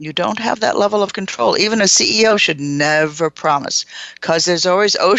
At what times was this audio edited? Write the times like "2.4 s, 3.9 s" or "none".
none